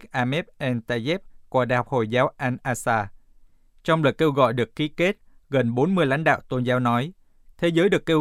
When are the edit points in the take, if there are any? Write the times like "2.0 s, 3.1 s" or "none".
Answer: none

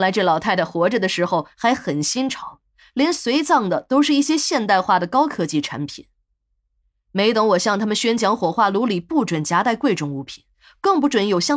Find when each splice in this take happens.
none

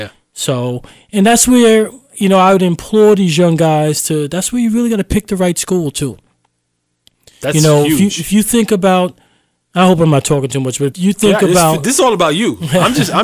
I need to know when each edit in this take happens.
10.9 s

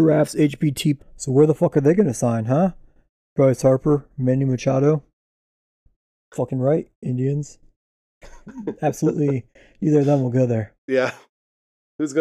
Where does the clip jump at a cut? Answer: 1.0 s

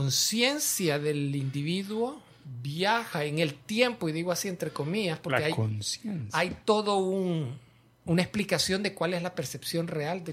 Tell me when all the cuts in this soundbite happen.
none

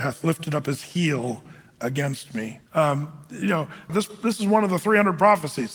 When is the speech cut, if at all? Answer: 2.7 s, 3.9 s

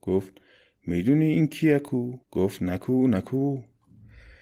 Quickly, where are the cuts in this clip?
2.2 s

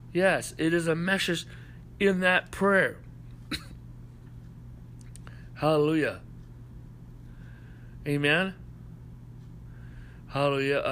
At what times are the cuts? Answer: none

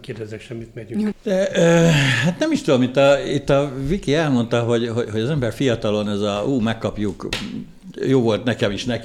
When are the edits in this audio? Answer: 1.1 s

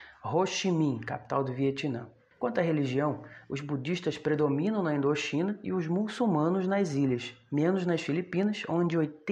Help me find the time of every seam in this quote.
2.3 s

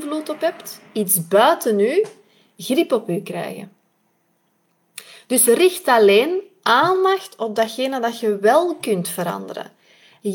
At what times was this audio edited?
none

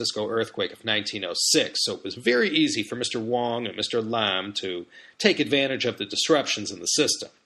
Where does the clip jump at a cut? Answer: none

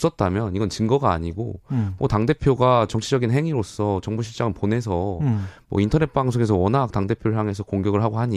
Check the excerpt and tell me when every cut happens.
none

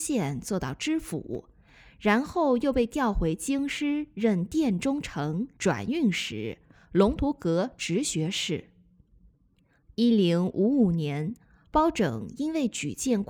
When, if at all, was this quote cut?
5.6 s

